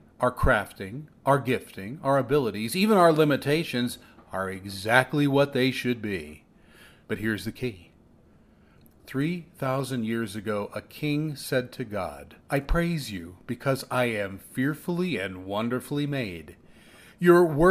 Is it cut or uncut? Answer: cut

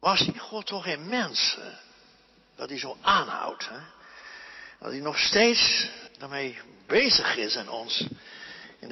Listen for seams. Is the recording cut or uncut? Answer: cut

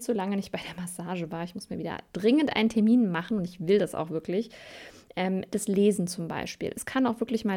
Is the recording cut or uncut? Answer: uncut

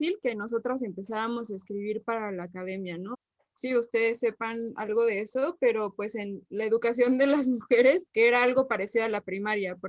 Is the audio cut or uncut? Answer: cut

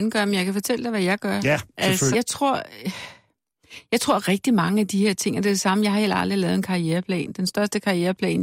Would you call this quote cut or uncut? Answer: cut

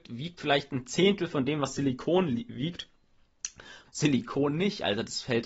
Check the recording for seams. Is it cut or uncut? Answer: cut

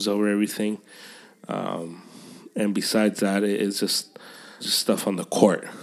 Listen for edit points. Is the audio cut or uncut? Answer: cut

